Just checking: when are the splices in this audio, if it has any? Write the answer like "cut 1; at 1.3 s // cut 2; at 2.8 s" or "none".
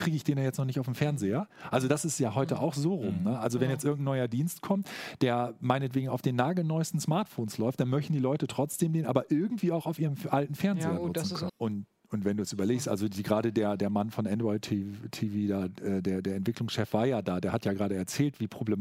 cut 1; at 11.5 s